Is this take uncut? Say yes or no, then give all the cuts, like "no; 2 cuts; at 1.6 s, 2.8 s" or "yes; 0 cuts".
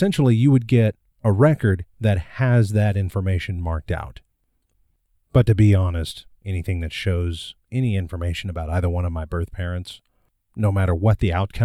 no; 2 cuts; at 6.4 s, 7.6 s